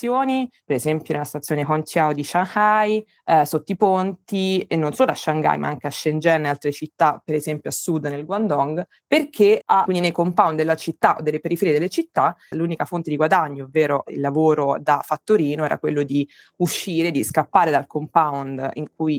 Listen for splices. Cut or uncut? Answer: cut